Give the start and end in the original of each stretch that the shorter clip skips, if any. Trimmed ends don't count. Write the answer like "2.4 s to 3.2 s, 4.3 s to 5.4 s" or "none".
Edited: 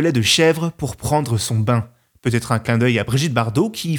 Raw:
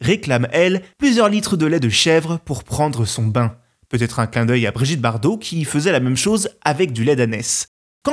none